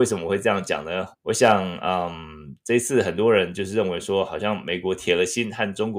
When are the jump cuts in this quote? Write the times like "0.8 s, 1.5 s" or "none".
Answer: 1.1 s